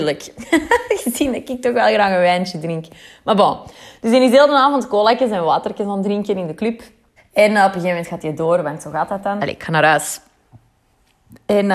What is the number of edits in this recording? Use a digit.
2